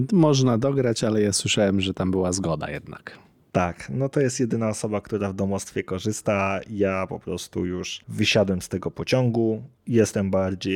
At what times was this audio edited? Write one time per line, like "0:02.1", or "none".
0:09.8